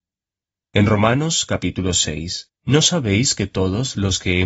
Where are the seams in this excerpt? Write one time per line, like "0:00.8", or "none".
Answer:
0:02.6